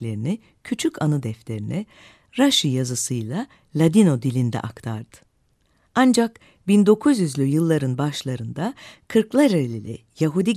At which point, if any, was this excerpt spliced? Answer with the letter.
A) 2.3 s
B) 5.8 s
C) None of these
B